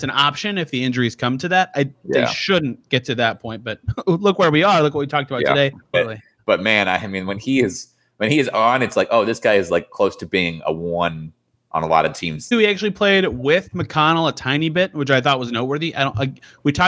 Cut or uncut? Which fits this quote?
cut